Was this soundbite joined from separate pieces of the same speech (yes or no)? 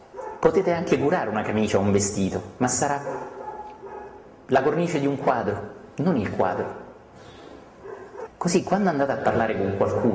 yes